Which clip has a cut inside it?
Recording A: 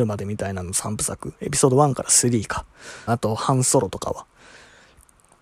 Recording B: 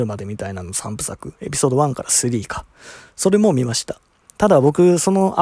A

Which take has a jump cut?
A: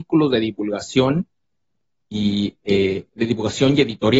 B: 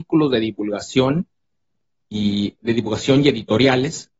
B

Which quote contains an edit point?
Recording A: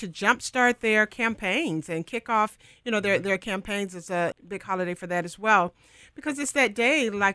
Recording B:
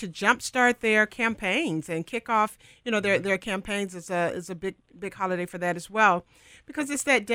A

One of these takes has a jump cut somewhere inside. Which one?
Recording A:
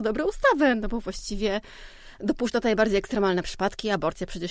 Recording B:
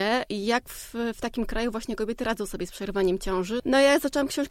B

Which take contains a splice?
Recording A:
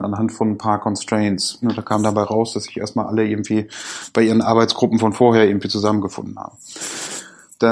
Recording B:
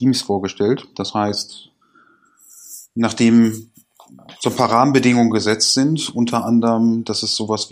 A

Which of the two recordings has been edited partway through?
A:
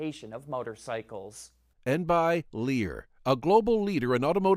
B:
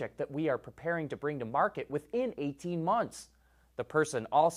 A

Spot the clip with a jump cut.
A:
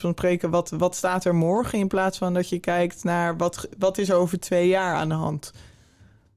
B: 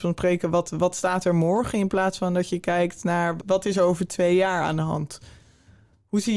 B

